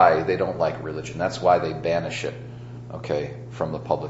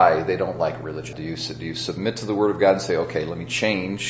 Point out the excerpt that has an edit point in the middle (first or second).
second